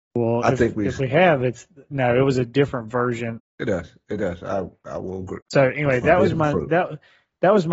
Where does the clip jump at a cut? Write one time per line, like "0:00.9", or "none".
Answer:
0:03.4
0:05.4